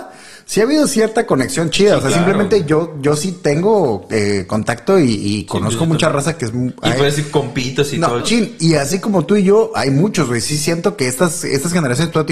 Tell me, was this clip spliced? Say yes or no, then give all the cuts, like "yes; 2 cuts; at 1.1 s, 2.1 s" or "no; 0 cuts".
yes; 1 cut; at 8.2 s